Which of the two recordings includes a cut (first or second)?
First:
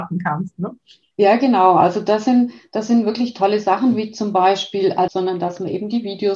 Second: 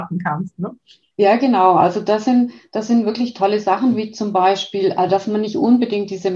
first